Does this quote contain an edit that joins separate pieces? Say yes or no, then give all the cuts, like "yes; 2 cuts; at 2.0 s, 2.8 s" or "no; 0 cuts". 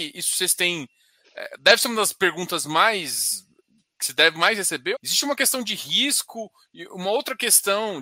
yes; 1 cut; at 4.9 s